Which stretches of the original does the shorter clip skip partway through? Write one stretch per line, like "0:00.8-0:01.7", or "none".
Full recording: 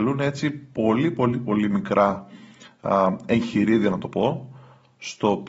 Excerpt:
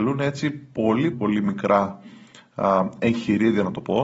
0:01.1-0:01.4